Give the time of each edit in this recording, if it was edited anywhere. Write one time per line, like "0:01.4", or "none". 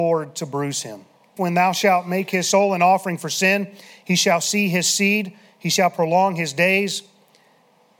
0:01.4